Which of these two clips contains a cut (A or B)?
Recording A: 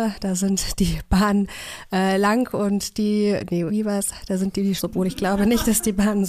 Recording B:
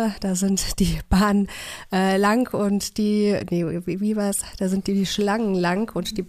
A